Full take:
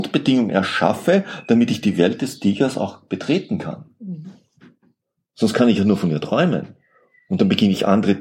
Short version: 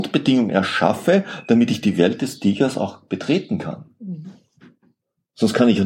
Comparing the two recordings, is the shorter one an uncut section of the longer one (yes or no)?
yes